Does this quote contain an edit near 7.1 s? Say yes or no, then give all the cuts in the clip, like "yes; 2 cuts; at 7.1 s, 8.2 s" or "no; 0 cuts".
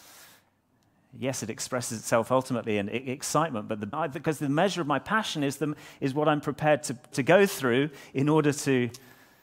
yes; 2 cuts; at 3.9 s, 7.1 s